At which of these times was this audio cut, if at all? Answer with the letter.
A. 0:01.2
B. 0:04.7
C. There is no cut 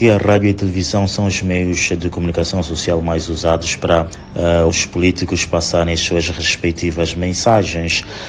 B